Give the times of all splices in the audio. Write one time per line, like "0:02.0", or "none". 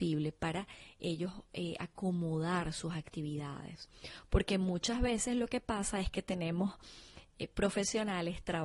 none